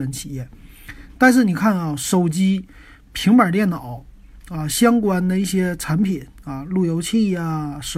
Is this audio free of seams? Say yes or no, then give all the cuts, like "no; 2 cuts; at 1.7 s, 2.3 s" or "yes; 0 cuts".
yes; 0 cuts